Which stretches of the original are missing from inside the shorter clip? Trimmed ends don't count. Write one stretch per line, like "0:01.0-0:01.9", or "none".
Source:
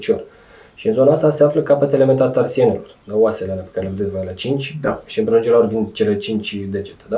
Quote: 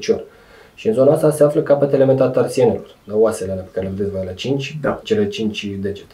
0:05.0-0:05.9